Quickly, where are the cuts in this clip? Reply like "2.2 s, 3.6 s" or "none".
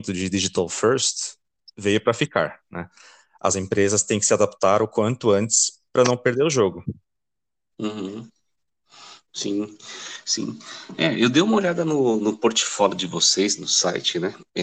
none